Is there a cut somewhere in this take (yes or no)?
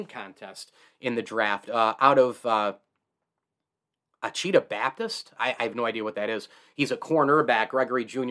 no